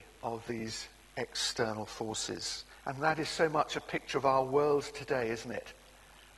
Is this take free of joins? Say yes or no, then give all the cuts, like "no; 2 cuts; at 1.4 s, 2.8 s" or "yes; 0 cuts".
no; 1 cut; at 2.8 s